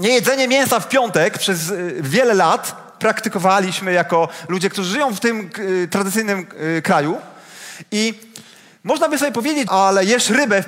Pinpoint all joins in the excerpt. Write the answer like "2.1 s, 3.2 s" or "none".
9.7 s